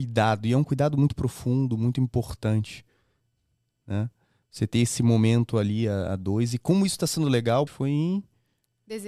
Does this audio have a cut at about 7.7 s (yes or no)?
yes